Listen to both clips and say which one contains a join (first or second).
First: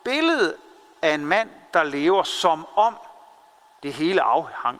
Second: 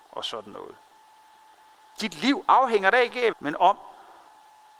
second